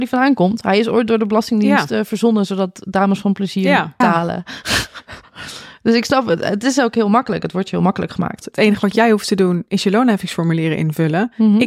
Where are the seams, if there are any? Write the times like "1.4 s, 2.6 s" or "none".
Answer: 4.0 s, 8.4 s